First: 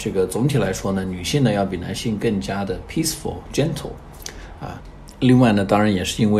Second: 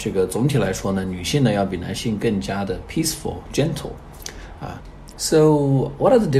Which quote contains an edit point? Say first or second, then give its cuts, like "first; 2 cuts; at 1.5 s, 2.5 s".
second; 1 cut; at 5.1 s